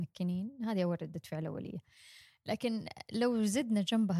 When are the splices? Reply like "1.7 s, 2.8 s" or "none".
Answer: none

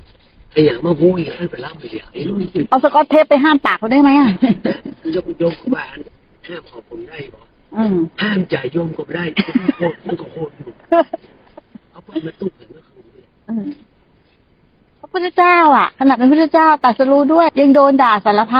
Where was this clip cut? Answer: 17.5 s

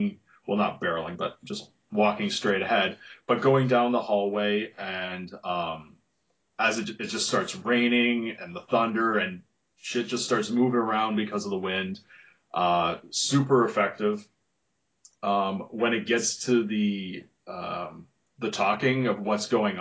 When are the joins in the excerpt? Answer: none

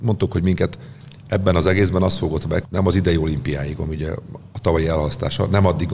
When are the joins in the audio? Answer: 2.6 s

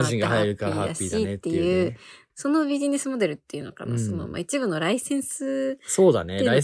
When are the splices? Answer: 2.3 s

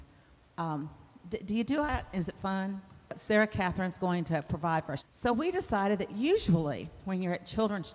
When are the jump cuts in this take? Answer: 3.1 s, 5.0 s

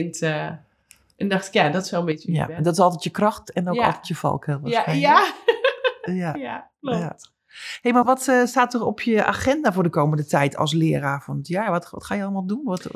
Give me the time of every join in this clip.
8.0 s

